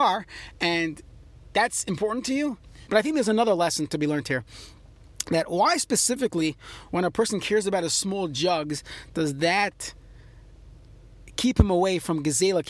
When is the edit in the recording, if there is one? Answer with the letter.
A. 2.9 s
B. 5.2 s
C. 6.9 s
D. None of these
A